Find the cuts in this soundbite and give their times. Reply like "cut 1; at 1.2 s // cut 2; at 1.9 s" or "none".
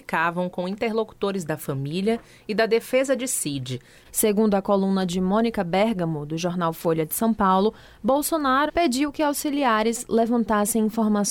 cut 1; at 4.0 s // cut 2; at 8.7 s